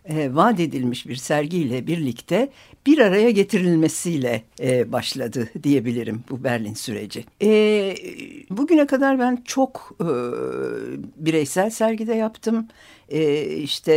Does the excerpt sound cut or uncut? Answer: cut